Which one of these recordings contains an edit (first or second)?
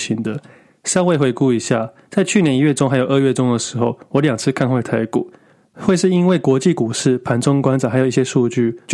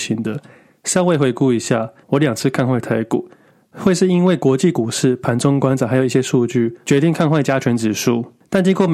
second